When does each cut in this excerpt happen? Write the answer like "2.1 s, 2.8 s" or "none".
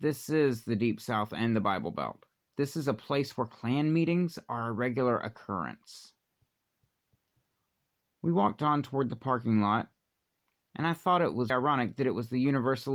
11.5 s